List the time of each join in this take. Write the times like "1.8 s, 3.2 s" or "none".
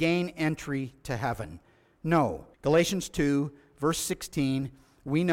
2.5 s

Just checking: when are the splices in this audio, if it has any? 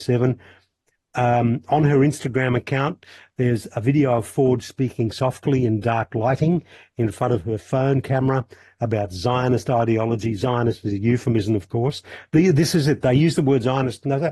none

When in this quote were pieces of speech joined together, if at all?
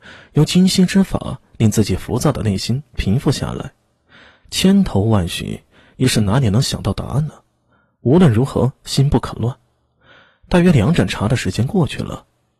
none

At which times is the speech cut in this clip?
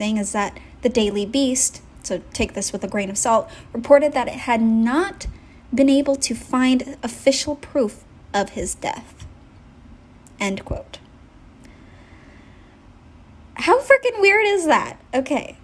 none

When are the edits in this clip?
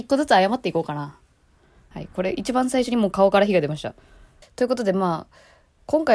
1.9 s, 4.4 s

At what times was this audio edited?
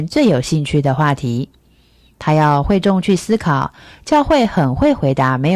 none

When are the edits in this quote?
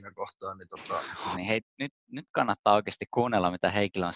1.3 s, 3.1 s

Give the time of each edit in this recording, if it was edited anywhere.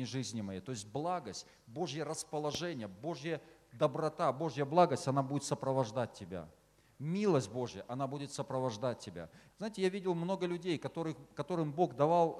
9.5 s

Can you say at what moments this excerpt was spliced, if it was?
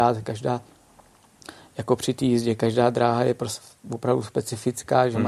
none

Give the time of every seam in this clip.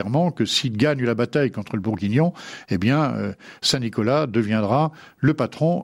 none

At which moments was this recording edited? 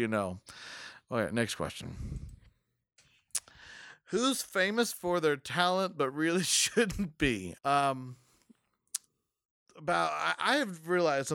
7.5 s

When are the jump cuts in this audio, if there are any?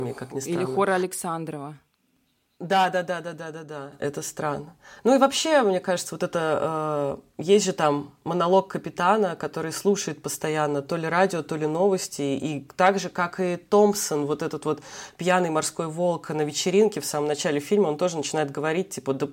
none

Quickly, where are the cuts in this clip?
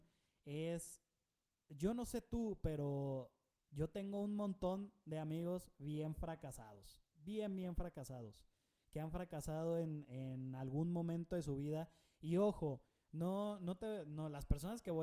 none

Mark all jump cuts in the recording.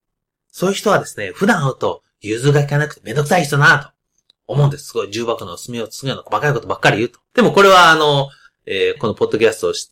7.3 s, 9.0 s

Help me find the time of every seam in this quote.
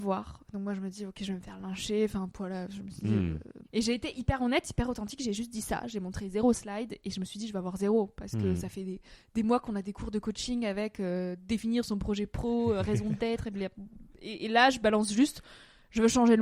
3.6 s

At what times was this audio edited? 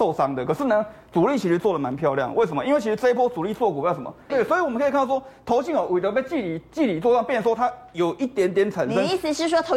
4.3 s

